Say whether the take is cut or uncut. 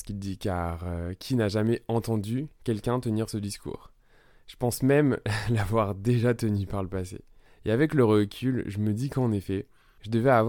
uncut